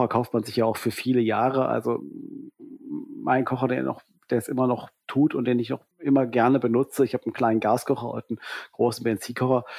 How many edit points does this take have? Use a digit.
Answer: 1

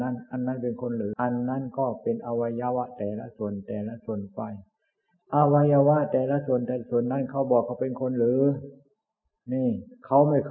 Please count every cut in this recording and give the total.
1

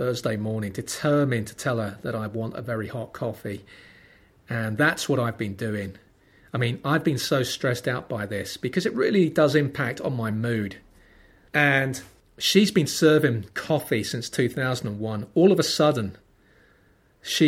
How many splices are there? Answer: 1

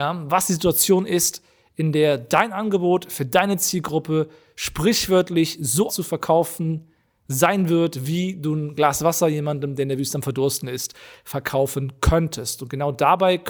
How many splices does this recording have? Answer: 1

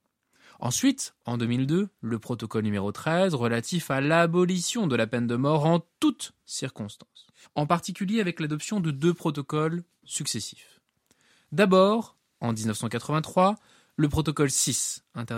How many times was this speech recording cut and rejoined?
1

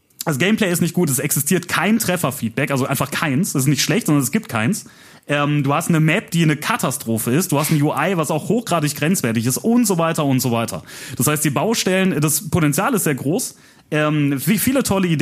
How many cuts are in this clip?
0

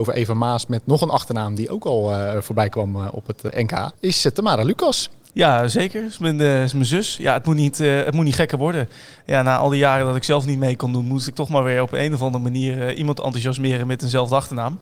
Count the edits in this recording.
1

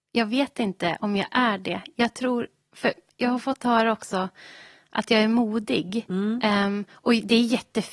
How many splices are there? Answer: 0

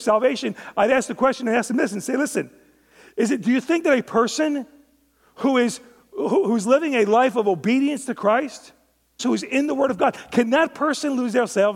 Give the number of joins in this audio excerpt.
1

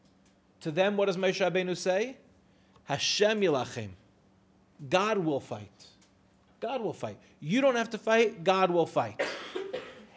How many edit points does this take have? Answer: 0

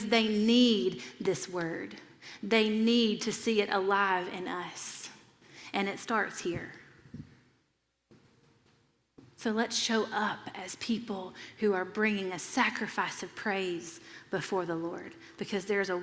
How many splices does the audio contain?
0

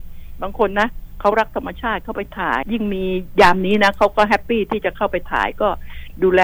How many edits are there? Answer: 1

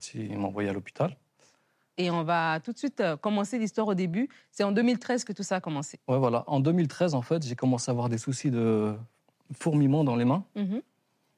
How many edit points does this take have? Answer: 1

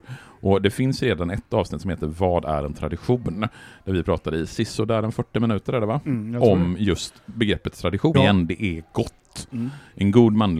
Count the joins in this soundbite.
1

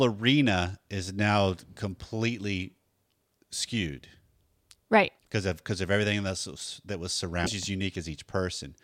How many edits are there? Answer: 2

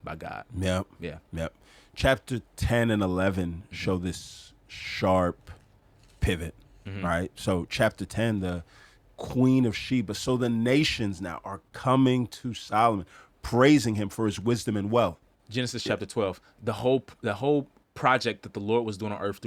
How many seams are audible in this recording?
0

